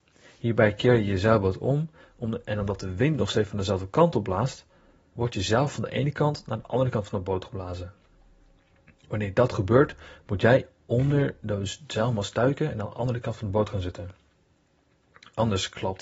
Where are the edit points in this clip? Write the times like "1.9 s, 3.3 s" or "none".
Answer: none